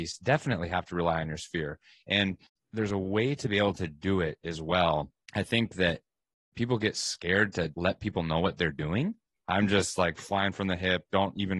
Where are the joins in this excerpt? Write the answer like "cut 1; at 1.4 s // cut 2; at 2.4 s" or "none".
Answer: cut 1; at 5.2 s // cut 2; at 7.7 s // cut 3; at 9.3 s